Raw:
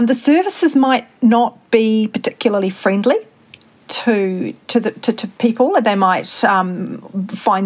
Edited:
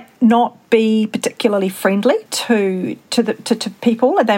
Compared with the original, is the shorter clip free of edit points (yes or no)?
no